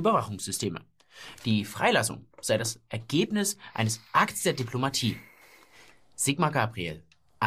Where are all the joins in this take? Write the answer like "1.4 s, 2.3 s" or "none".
1.4 s

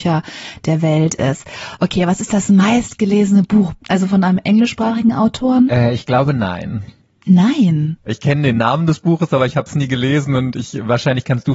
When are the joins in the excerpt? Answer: 3.8 s, 8.1 s

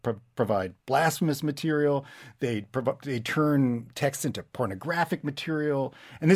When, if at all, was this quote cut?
none

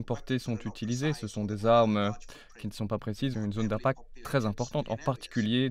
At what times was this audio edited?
3.3 s

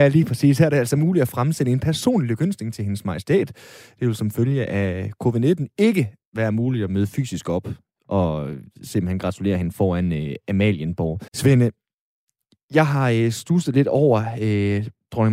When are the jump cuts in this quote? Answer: 11.3 s

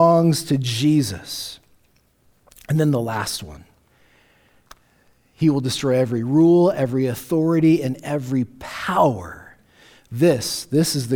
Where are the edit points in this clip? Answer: none

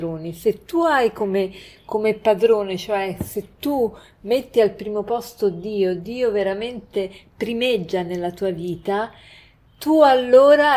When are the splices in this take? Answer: none

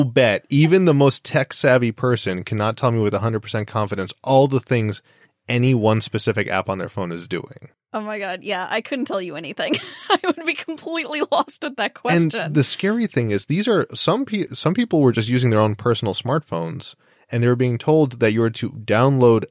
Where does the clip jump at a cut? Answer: 14.5 s

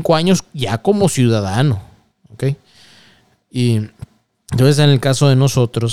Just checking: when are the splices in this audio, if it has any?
2.2 s

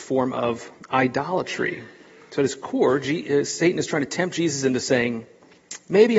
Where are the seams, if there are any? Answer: none

